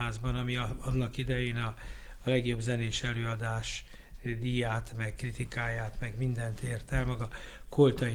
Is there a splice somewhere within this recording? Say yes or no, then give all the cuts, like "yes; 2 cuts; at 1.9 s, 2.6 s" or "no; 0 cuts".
no; 0 cuts